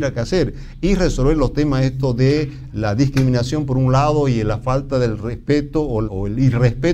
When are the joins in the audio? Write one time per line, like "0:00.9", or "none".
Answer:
0:06.0